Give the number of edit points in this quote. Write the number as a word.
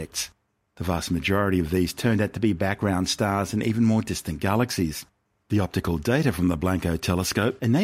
one